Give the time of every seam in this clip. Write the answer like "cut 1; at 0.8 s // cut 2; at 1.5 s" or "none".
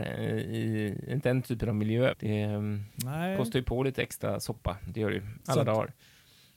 cut 1; at 2.1 s // cut 2; at 5.4 s